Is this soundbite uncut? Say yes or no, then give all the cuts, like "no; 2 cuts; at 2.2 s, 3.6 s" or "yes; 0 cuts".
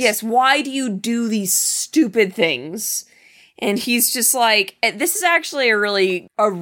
yes; 0 cuts